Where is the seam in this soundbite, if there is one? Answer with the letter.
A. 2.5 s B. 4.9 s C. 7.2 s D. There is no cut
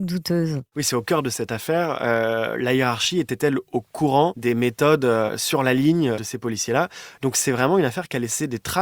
C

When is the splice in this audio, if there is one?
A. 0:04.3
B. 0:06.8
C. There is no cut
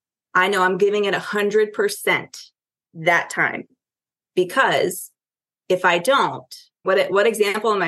B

